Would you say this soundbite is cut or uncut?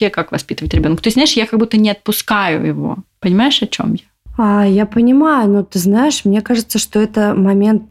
uncut